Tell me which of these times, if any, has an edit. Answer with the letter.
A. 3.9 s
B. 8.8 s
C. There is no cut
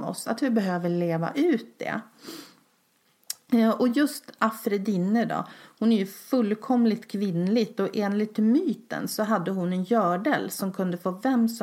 C